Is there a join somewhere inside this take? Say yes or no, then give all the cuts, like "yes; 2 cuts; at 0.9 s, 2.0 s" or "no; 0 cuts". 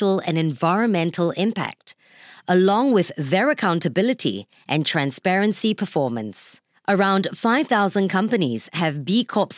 no; 0 cuts